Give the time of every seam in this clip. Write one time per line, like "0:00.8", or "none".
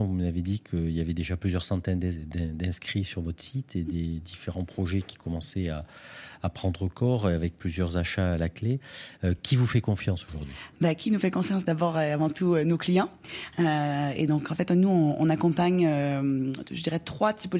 none

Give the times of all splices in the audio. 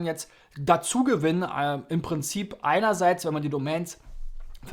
none

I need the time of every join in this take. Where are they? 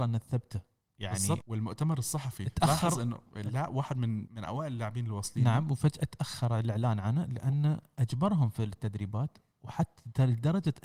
0:01.4
0:04.3

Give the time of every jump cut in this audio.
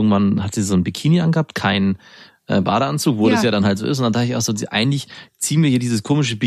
none

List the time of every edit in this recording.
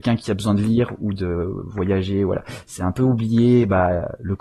none

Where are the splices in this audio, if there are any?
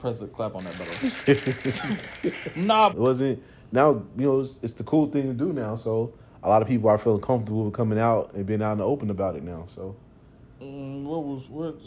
0:02.9

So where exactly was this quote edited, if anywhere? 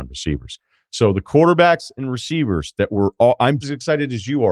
0:03.6

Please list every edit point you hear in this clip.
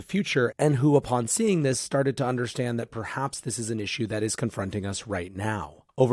none

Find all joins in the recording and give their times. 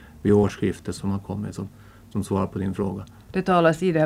0:01.0

